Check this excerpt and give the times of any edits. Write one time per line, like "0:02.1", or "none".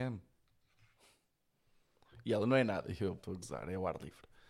0:03.2